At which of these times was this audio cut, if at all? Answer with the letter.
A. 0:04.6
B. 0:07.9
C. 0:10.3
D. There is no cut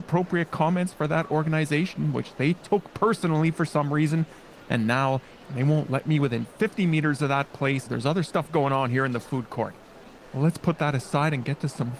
B